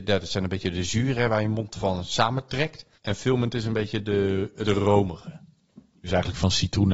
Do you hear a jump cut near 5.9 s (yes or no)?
no